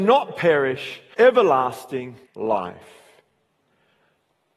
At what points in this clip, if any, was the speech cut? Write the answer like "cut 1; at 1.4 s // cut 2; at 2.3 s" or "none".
cut 1; at 1.1 s // cut 2; at 2.3 s